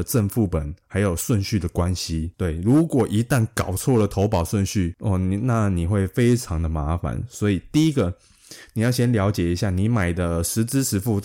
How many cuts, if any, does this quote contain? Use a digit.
0